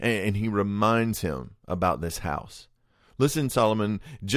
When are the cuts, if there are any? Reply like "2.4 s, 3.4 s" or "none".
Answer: none